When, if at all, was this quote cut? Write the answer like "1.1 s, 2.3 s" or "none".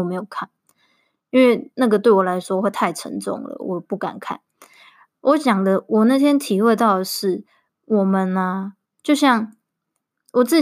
8.8 s